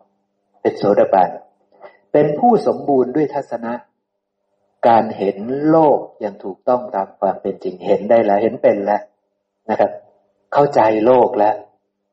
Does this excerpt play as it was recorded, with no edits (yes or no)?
yes